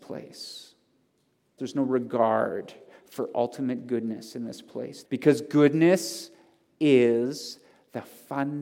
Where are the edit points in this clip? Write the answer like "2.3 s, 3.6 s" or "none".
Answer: 1.6 s, 5.0 s